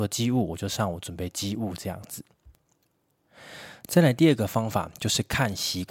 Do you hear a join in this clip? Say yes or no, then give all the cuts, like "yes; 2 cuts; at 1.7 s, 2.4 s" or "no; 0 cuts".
no; 0 cuts